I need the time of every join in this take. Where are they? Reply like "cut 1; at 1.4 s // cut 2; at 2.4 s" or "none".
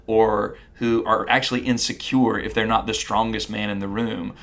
none